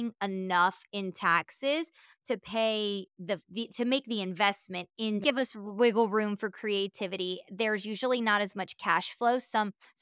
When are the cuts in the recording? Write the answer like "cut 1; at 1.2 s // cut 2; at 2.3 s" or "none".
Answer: cut 1; at 5.2 s